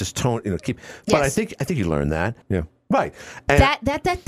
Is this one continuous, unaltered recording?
no; 1 cut; at 2.4 s

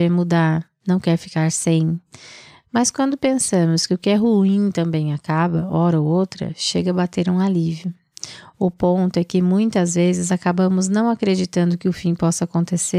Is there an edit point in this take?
no; 0 cuts

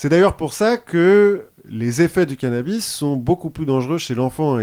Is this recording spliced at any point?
no; 0 cuts

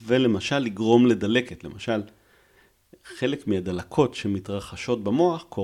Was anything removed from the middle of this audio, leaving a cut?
no; 0 cuts

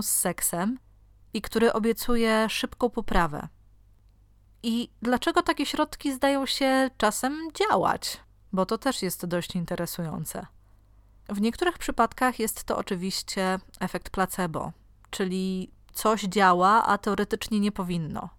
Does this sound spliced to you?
no; 0 cuts

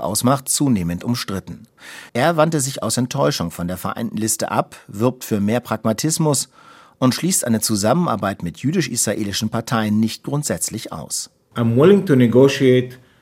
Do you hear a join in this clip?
yes; 1 cut; at 2.1 s

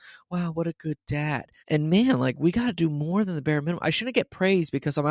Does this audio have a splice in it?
yes; 1 cut; at 1.6 s

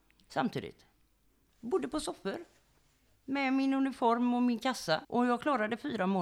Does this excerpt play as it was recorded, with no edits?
no; 1 cut; at 5.0 s

